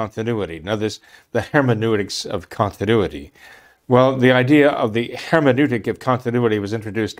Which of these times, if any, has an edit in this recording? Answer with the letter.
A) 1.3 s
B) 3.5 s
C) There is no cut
A